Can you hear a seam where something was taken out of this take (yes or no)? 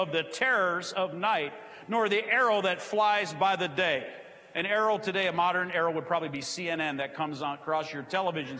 no